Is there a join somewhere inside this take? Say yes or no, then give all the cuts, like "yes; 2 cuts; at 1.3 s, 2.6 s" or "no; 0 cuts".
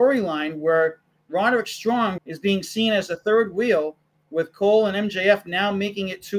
yes; 1 cut; at 2.2 s